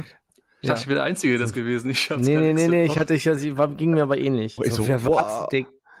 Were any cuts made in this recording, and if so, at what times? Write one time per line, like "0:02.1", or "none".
0:04.6